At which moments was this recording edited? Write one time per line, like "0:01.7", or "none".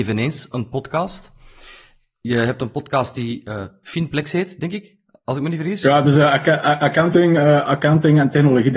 none